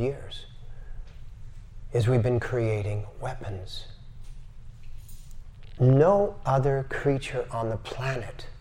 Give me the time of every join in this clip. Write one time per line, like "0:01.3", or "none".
0:05.8